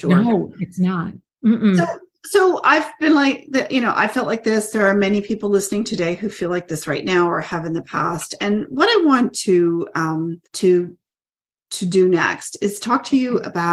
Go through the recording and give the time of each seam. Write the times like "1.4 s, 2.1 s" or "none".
10.4 s